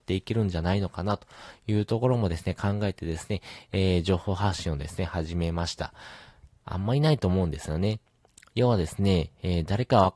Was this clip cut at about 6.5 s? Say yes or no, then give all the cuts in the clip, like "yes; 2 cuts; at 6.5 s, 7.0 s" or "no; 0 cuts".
yes; 1 cut; at 6.5 s